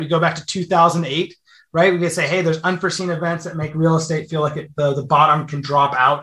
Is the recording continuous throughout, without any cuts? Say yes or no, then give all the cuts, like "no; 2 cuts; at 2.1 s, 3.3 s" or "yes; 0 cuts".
yes; 0 cuts